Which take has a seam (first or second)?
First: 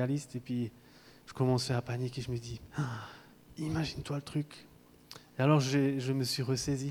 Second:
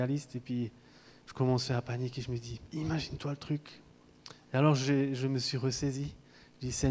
second